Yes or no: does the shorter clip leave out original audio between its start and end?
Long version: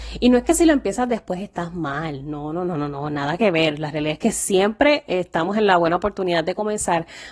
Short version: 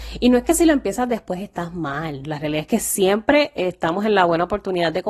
yes